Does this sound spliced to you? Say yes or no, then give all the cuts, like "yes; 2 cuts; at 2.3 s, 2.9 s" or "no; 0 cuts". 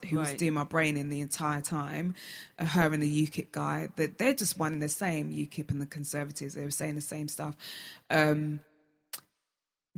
no; 0 cuts